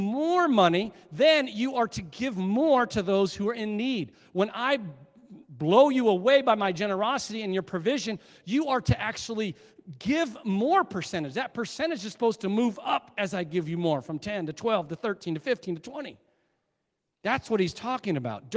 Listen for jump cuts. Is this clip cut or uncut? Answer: uncut